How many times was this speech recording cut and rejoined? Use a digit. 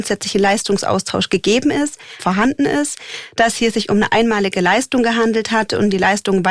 1